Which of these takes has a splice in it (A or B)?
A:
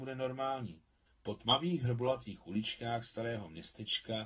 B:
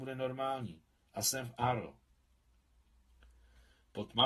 A